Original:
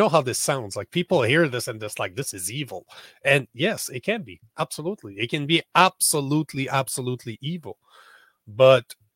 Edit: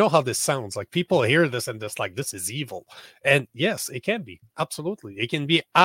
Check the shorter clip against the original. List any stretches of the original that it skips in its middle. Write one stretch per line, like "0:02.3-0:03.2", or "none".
none